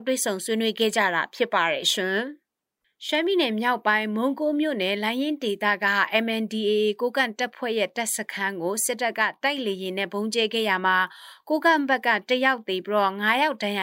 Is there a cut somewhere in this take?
no; 0 cuts

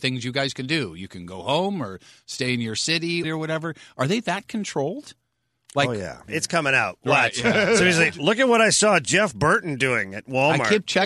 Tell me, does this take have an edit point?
yes; 2 cuts; at 3.2 s, 6.3 s

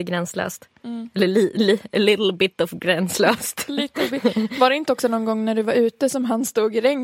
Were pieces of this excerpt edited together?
no; 0 cuts

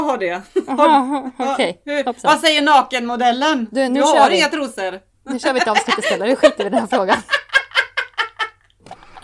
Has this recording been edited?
no; 0 cuts

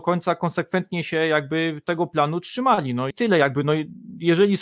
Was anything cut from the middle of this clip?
yes; 1 cut; at 3.1 s

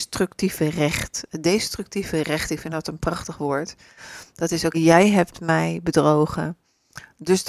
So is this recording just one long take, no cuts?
no; 1 cut; at 4.7 s

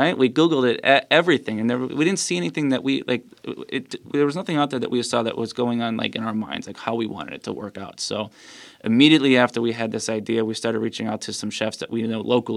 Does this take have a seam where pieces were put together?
no; 0 cuts

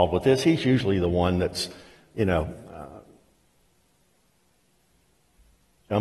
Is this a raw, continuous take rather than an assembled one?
yes; 0 cuts

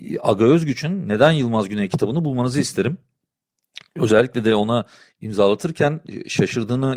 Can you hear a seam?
no; 0 cuts

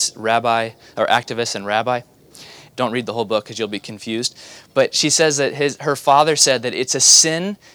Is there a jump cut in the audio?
yes; 2 cuts; at 2.7 s, 4.7 s

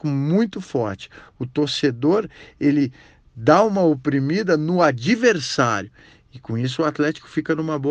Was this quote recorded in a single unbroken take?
yes; 0 cuts

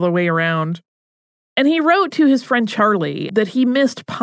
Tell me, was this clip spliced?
yes; 1 cut; at 3.3 s

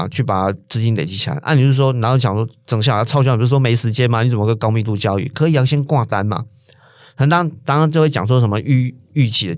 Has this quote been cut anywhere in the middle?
no; 0 cuts

